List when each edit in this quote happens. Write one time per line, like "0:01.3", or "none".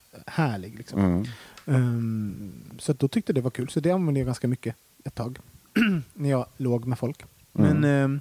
none